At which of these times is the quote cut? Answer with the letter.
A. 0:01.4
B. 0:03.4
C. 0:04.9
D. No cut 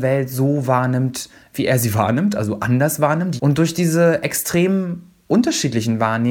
B